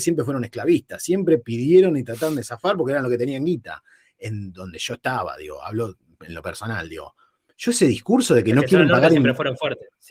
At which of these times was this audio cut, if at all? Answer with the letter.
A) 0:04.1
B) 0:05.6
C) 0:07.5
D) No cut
D